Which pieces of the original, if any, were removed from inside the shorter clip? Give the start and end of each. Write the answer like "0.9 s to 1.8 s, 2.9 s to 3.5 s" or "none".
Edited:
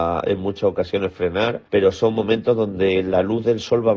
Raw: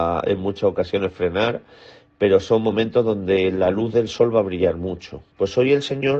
1.7 s to 2.2 s